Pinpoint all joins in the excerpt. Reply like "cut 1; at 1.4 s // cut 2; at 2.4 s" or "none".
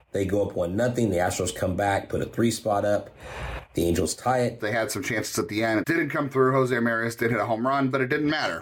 cut 1; at 4.6 s // cut 2; at 5.8 s